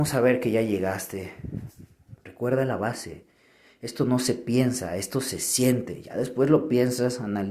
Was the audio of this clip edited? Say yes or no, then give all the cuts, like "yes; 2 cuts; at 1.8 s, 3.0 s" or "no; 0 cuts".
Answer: no; 0 cuts